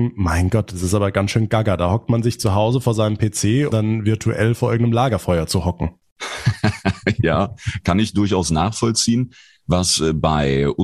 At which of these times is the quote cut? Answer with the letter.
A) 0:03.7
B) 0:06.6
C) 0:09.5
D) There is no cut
A